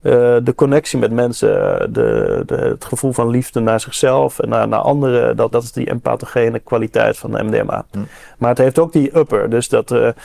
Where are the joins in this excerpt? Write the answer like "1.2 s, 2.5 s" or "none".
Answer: 5.5 s